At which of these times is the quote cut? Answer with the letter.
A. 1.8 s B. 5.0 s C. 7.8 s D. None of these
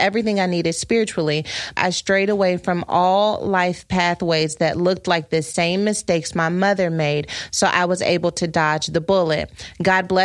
A